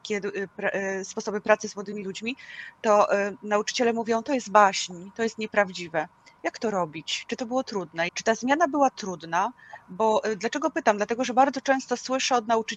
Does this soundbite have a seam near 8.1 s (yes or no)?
yes